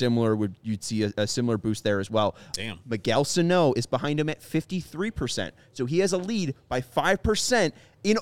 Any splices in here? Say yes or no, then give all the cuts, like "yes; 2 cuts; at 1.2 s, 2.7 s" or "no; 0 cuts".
yes; 1 cut; at 2.5 s